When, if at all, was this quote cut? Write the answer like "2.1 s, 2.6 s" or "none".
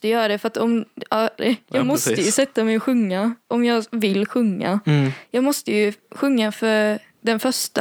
1.4 s